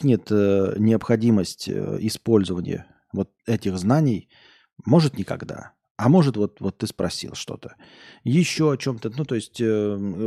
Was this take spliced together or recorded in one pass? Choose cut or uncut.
uncut